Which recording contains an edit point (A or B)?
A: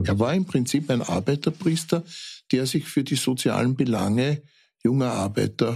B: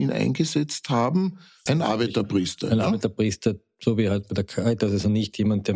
B